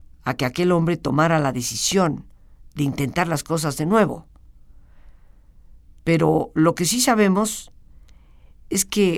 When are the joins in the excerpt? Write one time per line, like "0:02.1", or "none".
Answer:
0:06.0